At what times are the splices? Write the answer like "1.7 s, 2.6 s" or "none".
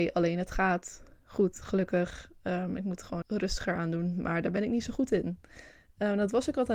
3.2 s